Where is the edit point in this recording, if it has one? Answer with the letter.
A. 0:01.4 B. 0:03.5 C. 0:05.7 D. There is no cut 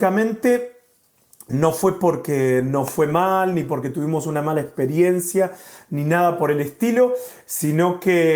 D